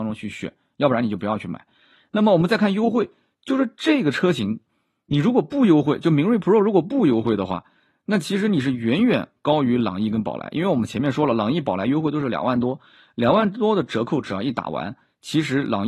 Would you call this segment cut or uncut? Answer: uncut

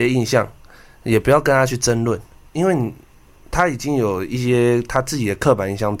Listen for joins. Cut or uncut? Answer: uncut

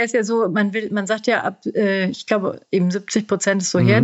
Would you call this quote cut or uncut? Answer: uncut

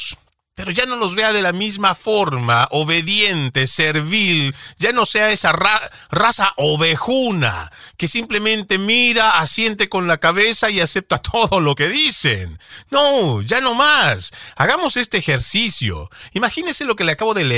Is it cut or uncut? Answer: uncut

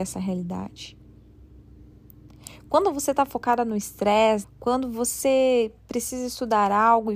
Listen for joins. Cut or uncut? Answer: cut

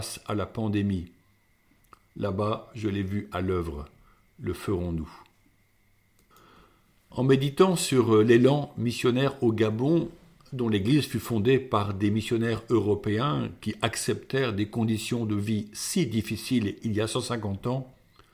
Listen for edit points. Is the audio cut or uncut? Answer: uncut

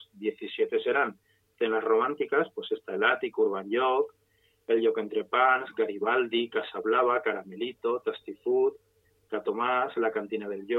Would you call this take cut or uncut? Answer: uncut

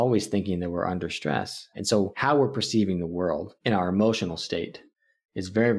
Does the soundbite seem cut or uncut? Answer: cut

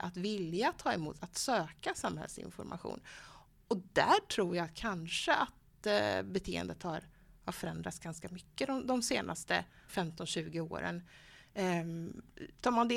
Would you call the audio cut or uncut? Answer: cut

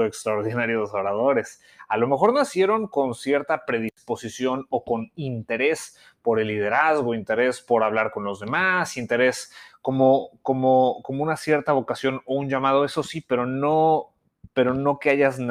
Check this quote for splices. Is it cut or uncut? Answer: uncut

